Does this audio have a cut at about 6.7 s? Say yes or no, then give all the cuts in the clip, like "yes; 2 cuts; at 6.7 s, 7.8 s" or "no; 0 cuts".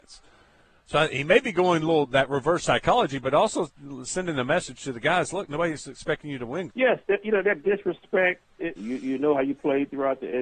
yes; 2 cuts; at 6.7 s, 8.8 s